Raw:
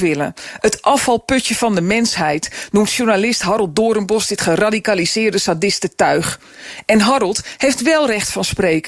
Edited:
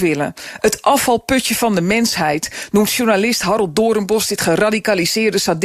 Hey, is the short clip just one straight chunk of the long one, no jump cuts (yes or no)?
yes